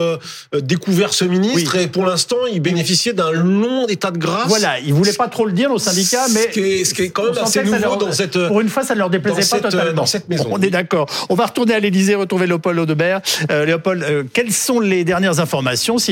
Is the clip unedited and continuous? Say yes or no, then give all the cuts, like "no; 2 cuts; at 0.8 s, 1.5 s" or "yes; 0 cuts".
yes; 0 cuts